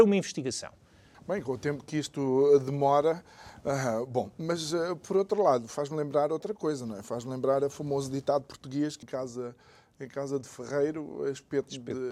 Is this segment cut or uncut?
cut